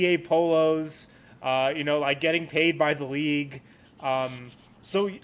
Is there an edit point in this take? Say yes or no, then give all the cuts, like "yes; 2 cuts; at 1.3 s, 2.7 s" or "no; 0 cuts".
no; 0 cuts